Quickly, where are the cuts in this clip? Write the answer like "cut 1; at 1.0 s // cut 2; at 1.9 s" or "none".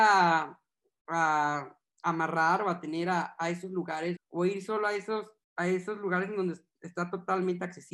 cut 1; at 4.2 s // cut 2; at 5.4 s